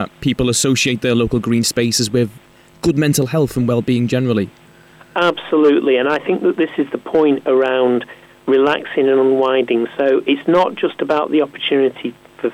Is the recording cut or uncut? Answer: uncut